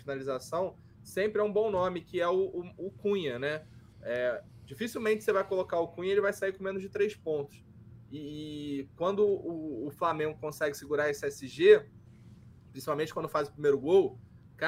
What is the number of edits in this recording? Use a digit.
0